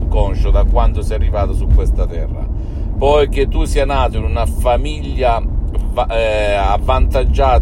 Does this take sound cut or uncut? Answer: uncut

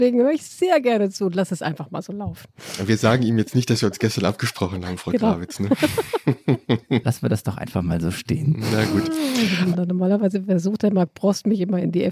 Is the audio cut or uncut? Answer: cut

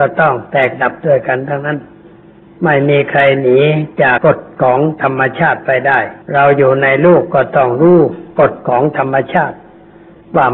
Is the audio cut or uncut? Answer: cut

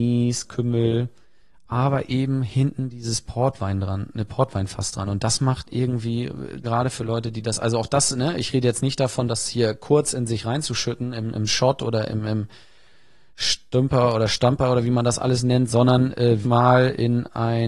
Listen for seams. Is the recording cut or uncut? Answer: cut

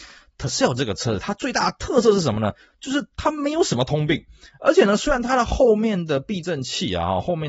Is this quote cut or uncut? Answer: uncut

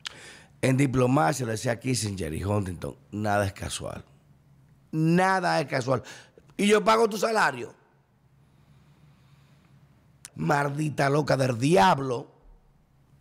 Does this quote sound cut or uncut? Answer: cut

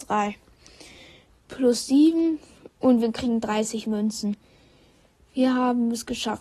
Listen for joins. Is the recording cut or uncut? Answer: cut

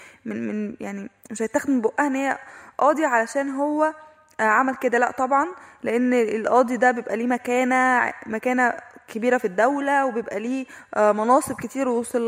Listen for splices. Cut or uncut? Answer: uncut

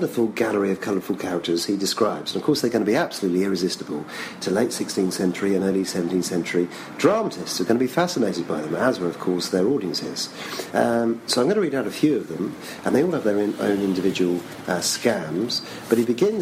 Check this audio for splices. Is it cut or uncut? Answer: uncut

